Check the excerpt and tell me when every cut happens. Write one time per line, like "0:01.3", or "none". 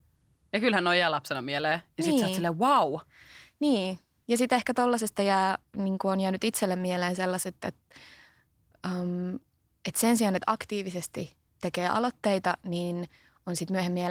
none